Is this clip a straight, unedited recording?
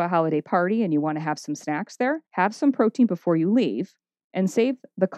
no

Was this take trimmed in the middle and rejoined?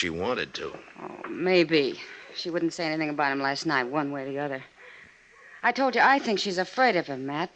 no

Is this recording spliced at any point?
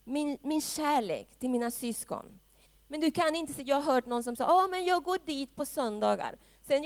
yes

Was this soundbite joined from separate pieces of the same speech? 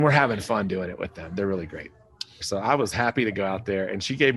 yes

